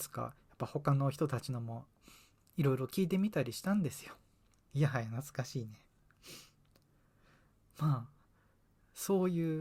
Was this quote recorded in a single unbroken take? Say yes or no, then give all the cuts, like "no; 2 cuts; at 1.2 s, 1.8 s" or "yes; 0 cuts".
no; 1 cut; at 4.6 s